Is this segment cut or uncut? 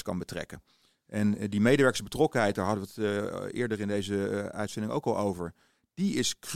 uncut